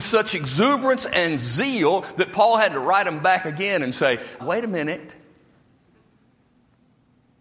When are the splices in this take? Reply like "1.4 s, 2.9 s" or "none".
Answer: 4.4 s